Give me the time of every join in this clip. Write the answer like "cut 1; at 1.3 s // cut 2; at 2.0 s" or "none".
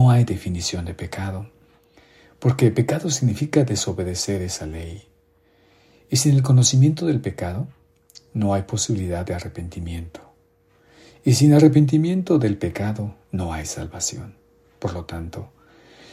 none

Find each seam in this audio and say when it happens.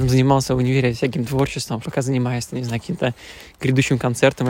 cut 1; at 1.8 s

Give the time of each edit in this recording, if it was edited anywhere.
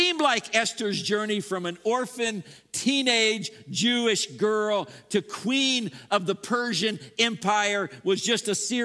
none

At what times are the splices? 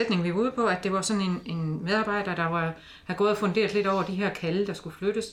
none

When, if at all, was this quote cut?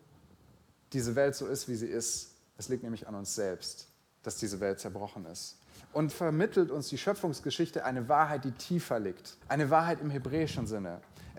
cut 1; at 6.1 s // cut 2; at 9.4 s

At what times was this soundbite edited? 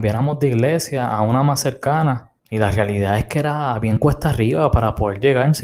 cut 1; at 2.4 s

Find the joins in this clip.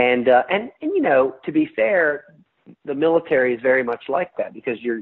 none

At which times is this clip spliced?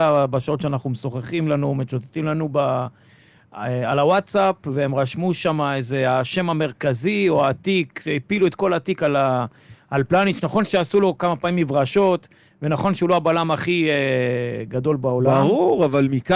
none

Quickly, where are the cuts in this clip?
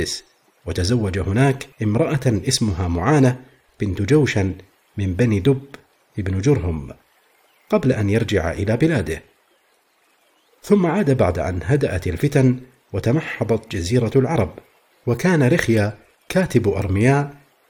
cut 1; at 1.7 s

